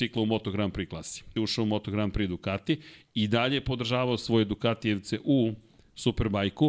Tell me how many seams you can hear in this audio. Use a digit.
1